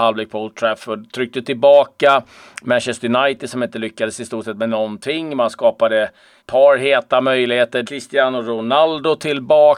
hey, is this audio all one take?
no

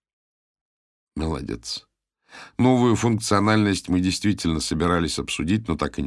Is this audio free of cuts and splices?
no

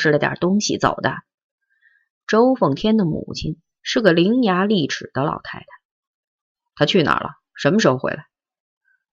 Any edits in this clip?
no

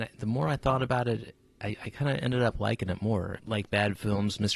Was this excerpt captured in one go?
no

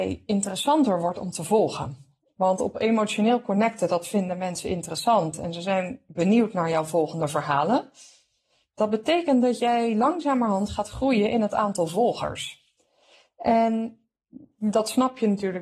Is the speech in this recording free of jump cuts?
yes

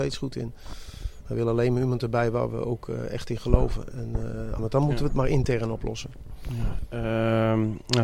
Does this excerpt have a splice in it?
yes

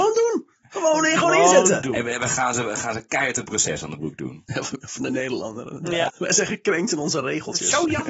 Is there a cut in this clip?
yes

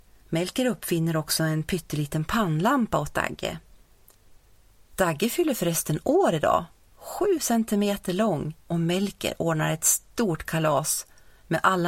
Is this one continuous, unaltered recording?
no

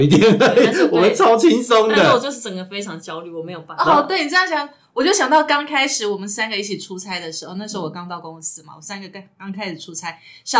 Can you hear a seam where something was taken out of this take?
no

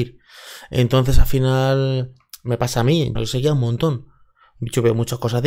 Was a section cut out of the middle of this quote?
yes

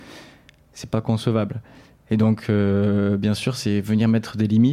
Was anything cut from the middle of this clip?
no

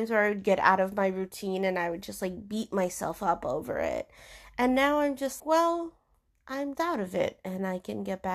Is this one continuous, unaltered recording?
no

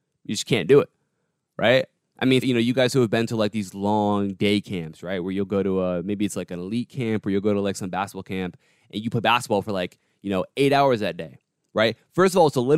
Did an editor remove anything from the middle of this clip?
yes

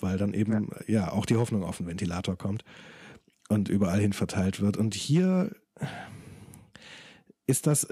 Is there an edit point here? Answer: no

